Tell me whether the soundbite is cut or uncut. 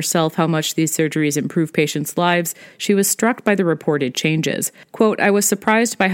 uncut